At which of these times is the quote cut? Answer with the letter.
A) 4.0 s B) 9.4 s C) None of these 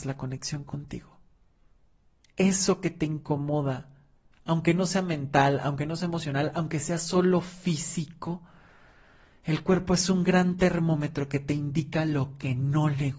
C